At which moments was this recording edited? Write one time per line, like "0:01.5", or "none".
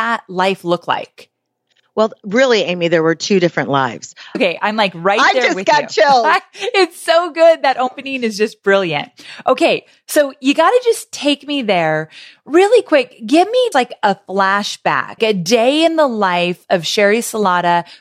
0:04.3
0:13.7
0:15.2